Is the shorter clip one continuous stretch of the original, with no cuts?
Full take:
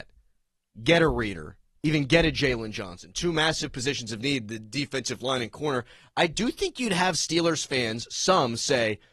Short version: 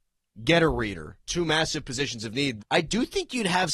no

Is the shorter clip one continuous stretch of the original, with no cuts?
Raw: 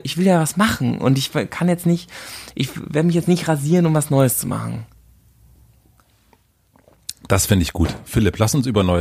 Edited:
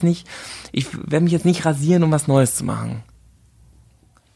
yes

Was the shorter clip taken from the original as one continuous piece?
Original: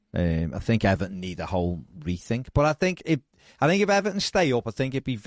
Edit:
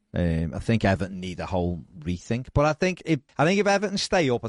no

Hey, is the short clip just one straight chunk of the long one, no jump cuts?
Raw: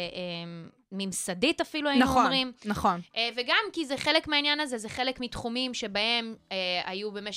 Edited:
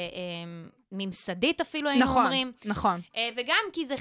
yes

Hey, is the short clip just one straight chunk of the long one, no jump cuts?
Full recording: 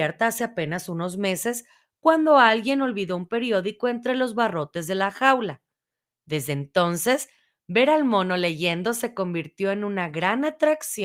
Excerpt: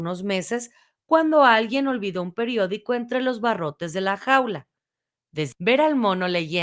no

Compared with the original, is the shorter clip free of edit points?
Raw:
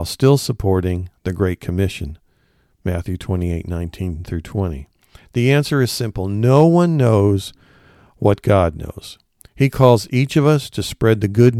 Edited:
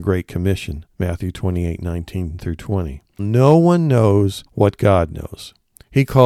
no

